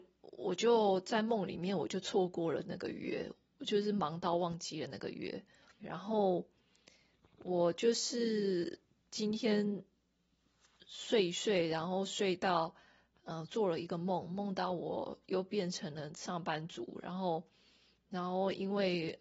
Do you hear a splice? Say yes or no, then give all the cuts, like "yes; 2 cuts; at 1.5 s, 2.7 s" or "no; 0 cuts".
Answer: yes; 1 cut; at 5.8 s